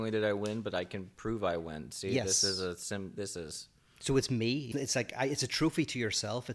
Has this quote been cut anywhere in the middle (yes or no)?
yes